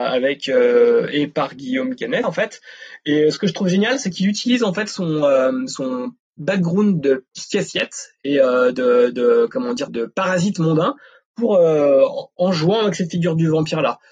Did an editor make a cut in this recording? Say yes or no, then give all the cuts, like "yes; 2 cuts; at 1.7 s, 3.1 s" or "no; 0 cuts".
yes; 2 cuts; at 2.2 s, 9.9 s